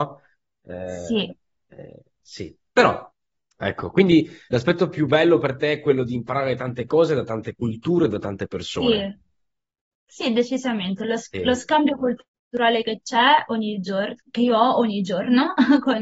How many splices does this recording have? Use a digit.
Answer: 0